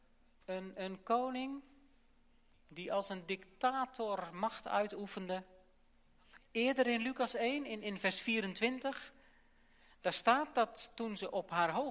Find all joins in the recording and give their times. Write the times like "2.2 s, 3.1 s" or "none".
6.4 s